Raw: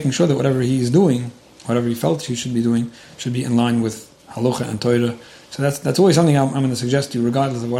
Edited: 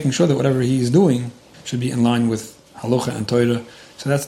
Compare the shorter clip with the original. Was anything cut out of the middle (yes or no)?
yes